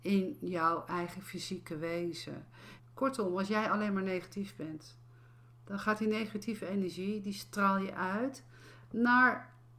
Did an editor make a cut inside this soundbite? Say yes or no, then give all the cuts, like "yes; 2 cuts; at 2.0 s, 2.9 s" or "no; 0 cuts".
yes; 1 cut; at 2.8 s